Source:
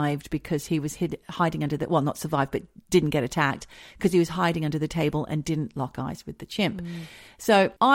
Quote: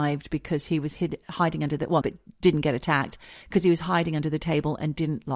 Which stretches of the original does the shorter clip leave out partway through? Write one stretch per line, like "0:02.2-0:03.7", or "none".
0:02.0-0:02.5